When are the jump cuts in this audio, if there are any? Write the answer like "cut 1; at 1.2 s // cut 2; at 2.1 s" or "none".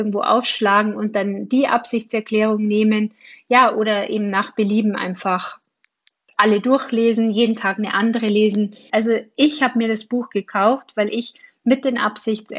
cut 1; at 8.9 s